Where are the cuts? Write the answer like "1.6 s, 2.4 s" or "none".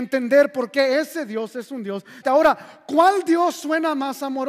2.2 s